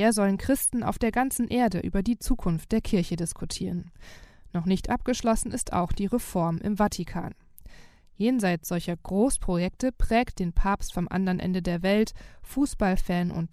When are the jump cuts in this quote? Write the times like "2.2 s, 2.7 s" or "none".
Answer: none

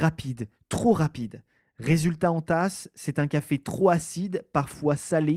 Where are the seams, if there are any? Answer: none

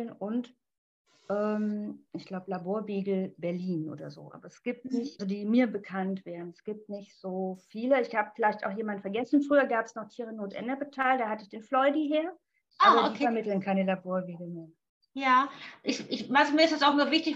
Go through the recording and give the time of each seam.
5.2 s

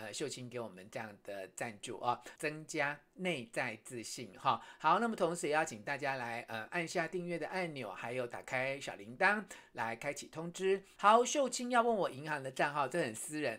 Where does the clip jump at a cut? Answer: 2.4 s, 11.0 s

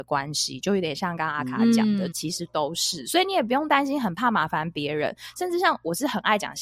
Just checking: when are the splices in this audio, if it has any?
2.1 s

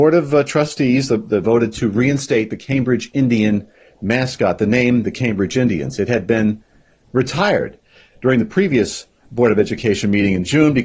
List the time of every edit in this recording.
1.4 s

